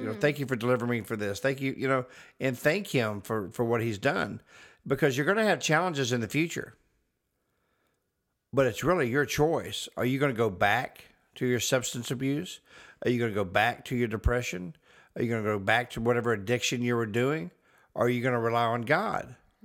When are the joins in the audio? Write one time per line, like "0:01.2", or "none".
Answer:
none